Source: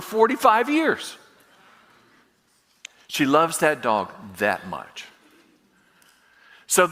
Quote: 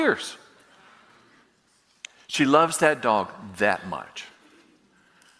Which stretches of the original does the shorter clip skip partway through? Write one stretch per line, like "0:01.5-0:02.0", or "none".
none